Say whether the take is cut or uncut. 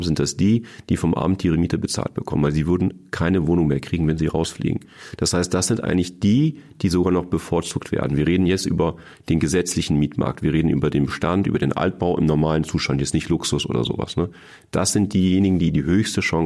uncut